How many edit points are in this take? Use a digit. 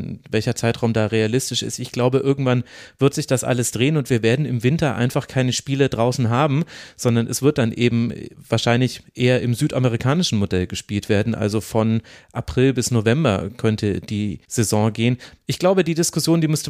1